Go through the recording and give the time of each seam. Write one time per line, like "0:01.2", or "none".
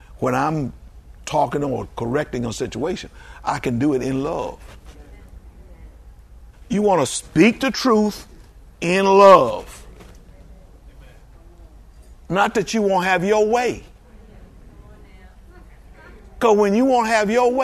none